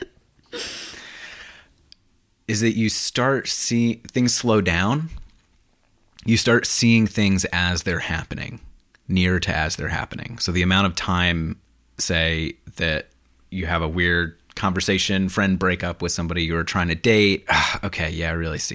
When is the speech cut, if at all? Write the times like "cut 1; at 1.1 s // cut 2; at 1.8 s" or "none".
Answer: cut 1; at 17.5 s